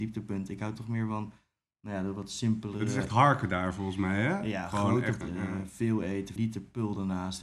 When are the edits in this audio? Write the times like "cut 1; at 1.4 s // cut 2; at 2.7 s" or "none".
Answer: cut 1; at 5.2 s // cut 2; at 6.4 s